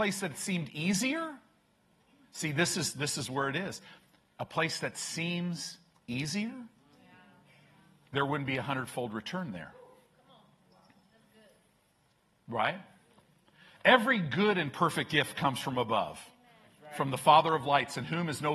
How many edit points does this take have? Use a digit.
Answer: 0